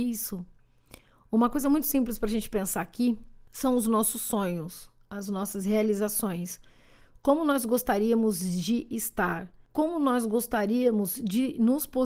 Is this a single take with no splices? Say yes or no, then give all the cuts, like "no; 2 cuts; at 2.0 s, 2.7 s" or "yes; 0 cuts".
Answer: yes; 0 cuts